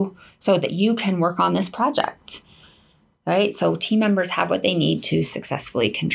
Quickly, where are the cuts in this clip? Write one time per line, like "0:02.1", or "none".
none